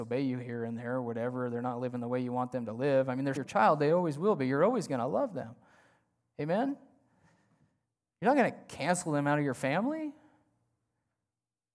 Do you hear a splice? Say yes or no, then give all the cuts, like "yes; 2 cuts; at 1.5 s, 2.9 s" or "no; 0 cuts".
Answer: yes; 1 cut; at 3.4 s